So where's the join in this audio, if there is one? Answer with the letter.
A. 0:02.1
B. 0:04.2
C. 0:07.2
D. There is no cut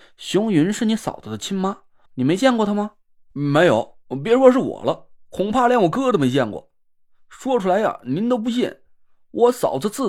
A